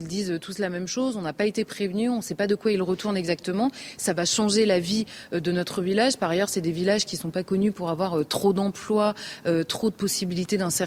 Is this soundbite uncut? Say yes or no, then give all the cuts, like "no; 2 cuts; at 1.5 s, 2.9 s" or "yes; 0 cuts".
yes; 0 cuts